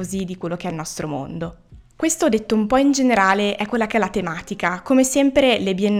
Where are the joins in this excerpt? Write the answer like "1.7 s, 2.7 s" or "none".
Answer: none

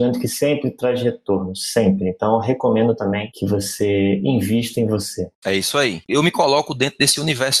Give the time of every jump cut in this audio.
6.1 s

